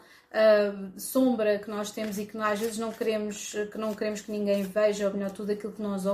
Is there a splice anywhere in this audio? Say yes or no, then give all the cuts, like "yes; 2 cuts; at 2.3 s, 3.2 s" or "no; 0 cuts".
no; 0 cuts